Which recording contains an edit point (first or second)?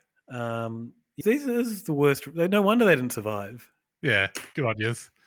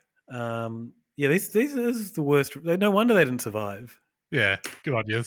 first